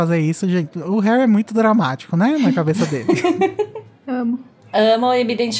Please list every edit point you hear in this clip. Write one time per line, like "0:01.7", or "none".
none